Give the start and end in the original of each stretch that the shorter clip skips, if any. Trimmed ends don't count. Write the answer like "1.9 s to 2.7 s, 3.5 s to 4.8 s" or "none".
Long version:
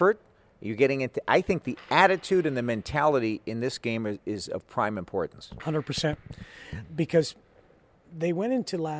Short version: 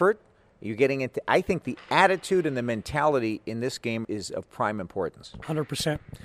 4.0 s to 4.2 s